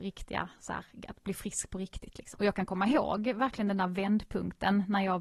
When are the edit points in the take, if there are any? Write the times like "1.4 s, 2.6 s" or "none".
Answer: 2.3 s